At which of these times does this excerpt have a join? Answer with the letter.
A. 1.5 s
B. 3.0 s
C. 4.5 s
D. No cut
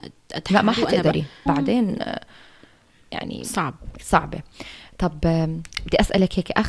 A